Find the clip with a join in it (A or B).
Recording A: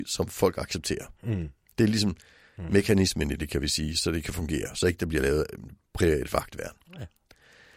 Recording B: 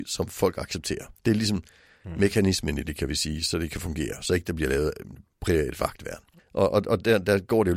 B